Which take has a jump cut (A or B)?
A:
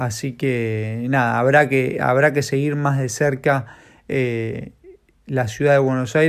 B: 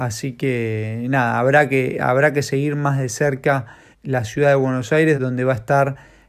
B